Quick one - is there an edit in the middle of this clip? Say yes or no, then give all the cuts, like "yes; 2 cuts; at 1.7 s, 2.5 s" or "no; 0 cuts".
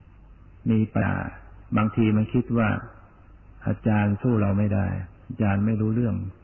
yes; 1 cut; at 1.0 s